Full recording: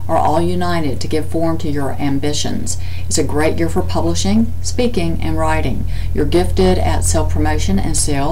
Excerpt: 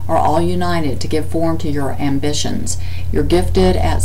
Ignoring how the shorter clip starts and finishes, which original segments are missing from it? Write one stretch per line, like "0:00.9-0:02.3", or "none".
0:03.1-0:06.1